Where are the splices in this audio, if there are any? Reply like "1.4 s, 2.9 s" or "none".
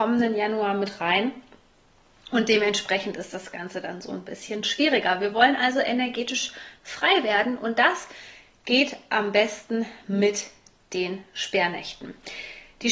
none